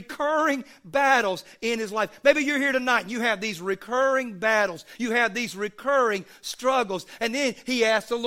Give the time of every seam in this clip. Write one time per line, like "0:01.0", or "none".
none